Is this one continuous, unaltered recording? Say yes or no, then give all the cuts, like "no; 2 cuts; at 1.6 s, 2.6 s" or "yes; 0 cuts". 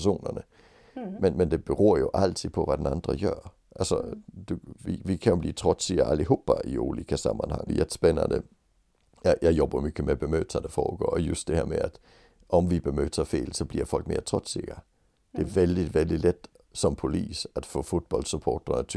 no; 1 cut; at 7.7 s